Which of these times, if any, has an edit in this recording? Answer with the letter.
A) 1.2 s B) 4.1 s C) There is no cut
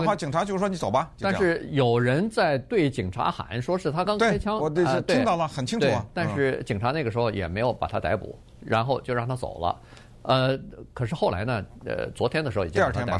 B